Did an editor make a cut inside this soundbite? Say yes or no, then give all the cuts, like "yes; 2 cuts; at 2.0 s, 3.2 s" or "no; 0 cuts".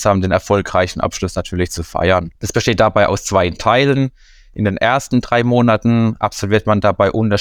yes; 1 cut; at 2.4 s